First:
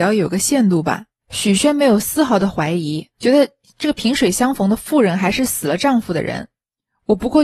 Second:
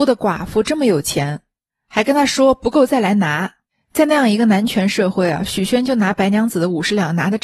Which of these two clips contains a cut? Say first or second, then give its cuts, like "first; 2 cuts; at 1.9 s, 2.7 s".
first; 2 cuts; at 1.2 s, 3.1 s